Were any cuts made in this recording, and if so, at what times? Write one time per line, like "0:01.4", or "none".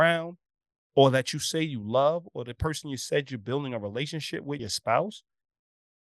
0:04.6